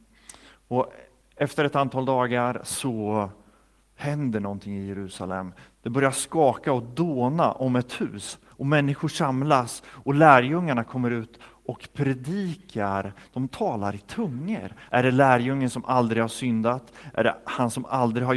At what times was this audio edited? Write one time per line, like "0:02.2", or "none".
0:14.9
0:17.1